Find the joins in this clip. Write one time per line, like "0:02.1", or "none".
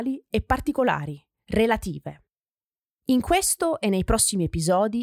0:03.0